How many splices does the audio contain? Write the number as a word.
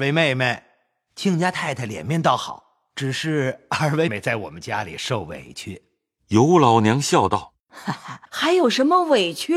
two